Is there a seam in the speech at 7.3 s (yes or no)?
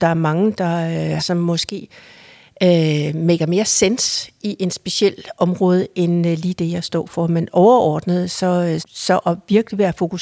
no